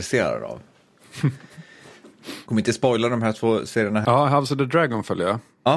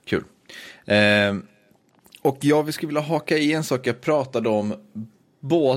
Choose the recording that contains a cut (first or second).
first